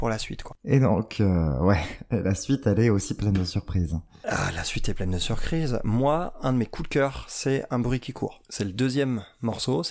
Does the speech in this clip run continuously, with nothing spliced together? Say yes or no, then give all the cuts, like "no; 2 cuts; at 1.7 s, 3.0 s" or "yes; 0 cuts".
yes; 0 cuts